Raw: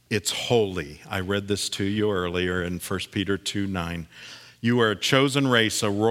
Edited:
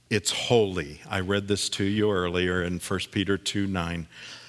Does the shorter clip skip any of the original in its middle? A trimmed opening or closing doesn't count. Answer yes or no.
no